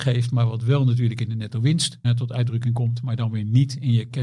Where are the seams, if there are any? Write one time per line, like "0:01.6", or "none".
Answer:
0:02.0